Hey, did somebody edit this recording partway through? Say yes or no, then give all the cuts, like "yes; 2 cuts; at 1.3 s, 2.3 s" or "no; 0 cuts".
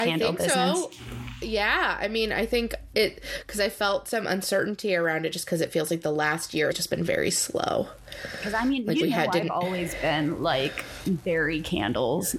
yes; 1 cut; at 6.7 s